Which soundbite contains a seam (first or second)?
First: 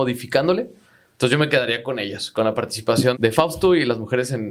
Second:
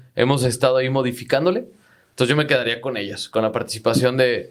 first